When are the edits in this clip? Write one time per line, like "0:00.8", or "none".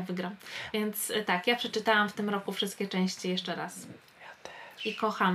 none